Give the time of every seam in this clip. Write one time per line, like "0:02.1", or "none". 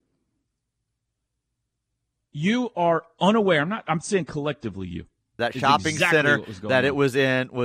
0:05.4